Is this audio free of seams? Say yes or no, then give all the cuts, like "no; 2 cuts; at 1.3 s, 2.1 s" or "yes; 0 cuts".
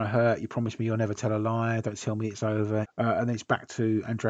no; 1 cut; at 2.8 s